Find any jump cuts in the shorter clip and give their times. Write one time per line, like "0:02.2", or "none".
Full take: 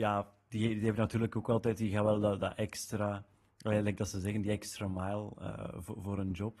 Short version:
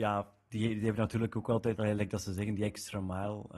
0:01.8